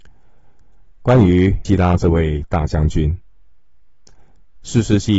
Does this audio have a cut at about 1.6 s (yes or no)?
yes